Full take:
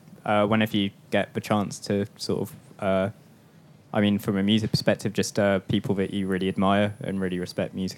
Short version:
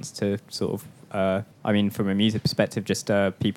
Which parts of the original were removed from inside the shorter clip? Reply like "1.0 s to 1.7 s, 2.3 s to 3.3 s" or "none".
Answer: 3.2 s to 3.8 s